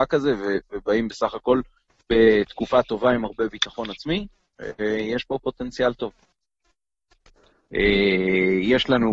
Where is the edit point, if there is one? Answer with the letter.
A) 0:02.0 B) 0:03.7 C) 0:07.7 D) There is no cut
C